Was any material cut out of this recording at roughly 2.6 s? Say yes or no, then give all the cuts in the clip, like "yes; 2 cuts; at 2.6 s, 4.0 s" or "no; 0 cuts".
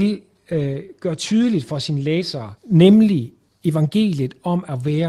yes; 1 cut; at 2.6 s